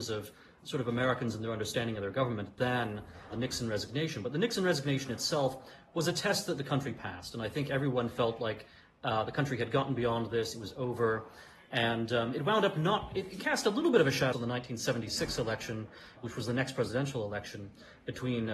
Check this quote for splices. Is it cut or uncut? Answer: cut